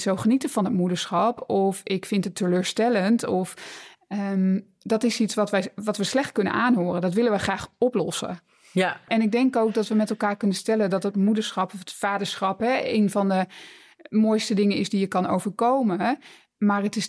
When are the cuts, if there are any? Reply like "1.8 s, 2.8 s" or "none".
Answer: 9.1 s